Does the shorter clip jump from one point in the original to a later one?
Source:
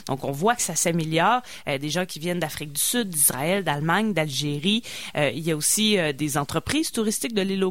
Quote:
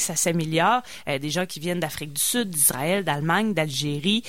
no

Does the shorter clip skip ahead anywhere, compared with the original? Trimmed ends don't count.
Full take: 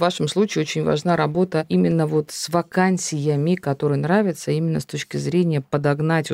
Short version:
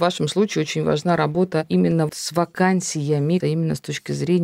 yes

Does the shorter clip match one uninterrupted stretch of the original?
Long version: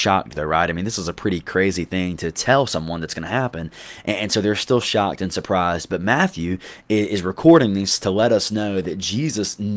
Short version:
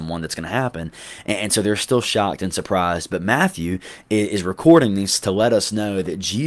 yes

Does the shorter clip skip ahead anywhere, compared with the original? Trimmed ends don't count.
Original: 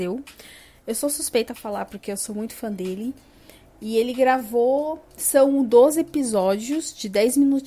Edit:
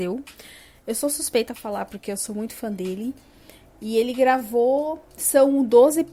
no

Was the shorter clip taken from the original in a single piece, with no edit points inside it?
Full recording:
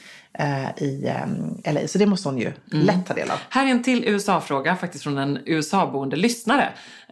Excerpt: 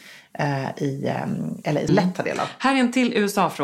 no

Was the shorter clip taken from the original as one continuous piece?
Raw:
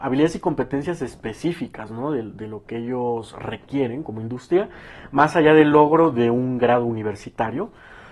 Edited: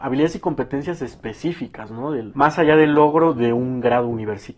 no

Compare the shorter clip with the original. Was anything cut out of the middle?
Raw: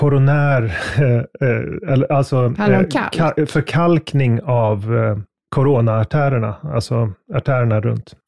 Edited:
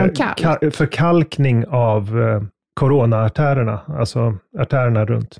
no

